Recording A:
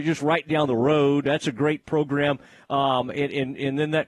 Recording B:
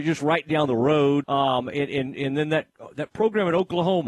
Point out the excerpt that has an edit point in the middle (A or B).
B